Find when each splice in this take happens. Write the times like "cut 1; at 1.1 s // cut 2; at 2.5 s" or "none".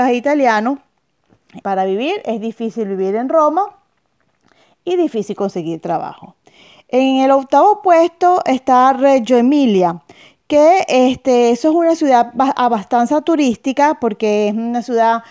cut 1; at 1.6 s

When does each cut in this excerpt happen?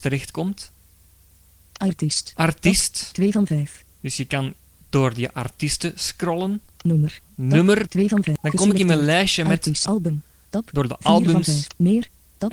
cut 1; at 7.9 s // cut 2; at 9.9 s

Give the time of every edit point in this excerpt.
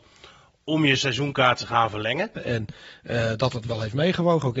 cut 1; at 2.4 s

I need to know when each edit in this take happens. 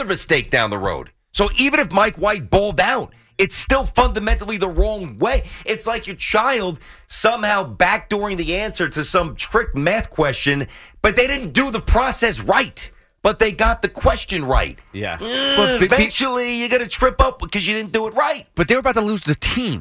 none

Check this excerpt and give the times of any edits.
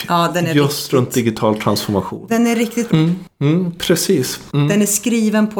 cut 1; at 2.9 s // cut 2; at 4.5 s

